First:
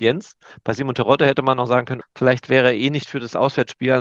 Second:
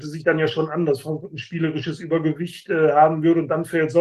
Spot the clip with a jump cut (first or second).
first